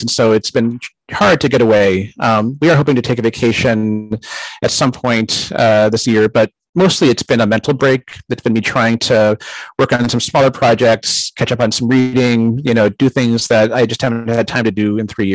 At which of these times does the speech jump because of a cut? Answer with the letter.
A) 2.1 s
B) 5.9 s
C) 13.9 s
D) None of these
D